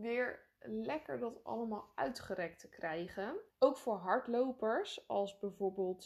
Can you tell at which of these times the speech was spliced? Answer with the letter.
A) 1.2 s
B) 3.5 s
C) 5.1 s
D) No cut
B